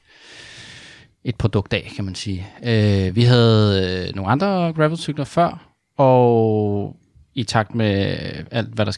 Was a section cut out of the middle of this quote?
no; 0 cuts

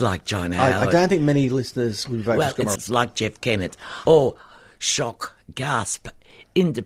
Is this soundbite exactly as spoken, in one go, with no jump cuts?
no; 2 cuts; at 2.8 s, 4.1 s

